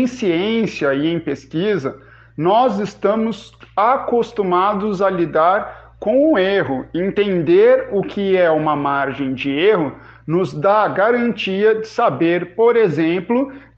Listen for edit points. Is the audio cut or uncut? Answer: uncut